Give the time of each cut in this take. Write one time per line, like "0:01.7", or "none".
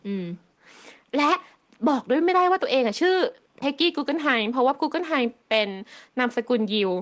none